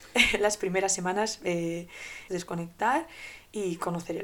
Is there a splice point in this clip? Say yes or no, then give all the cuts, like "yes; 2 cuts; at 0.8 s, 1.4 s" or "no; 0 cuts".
yes; 1 cut; at 2.3 s